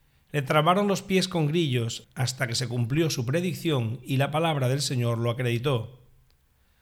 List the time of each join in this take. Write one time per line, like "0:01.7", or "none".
0:02.0